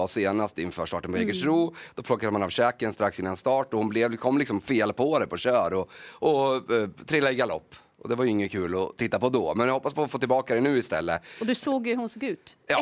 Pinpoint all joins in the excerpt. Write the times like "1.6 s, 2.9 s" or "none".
none

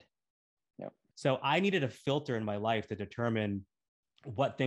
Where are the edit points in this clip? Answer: 1.1 s

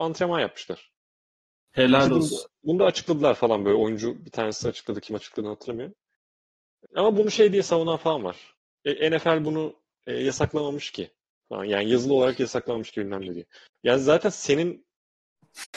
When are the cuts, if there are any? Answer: 6.9 s

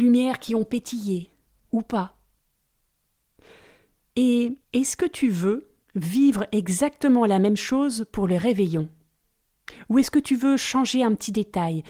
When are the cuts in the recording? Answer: 1.6 s, 4.6 s

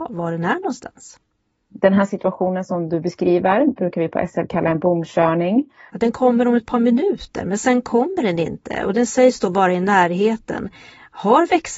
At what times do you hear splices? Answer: 5.9 s

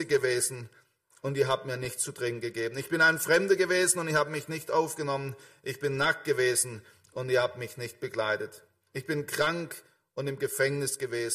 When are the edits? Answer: none

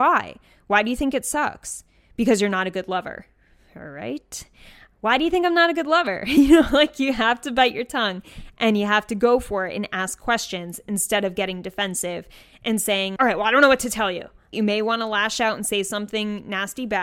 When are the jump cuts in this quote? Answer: 13.2 s, 14.5 s

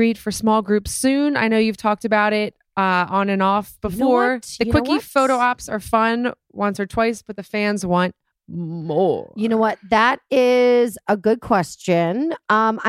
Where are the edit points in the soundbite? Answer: none

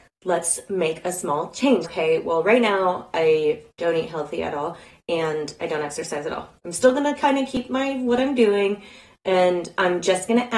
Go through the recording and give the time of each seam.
1.8 s, 6.6 s

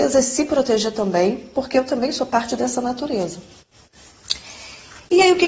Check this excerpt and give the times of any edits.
none

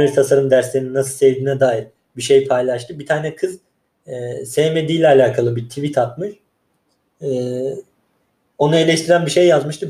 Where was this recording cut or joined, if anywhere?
none

